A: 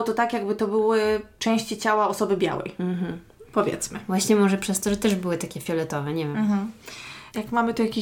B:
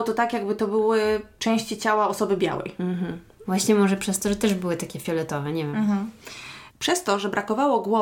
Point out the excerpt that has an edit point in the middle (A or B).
B